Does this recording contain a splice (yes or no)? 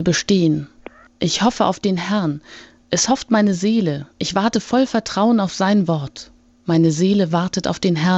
yes